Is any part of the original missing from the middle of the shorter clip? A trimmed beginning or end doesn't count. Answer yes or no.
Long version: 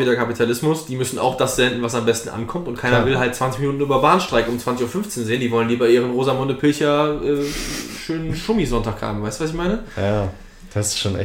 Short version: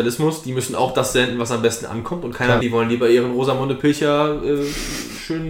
yes